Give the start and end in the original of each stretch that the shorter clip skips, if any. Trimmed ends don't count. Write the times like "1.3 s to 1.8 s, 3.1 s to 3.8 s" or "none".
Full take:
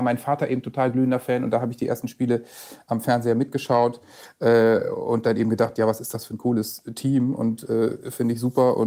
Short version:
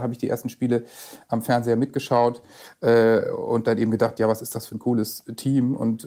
none